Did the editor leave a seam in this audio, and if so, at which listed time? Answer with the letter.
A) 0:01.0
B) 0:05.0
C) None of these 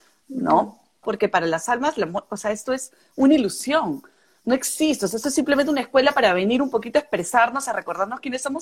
A